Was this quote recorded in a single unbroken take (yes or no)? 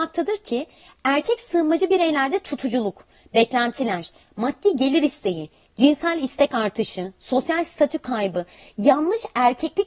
yes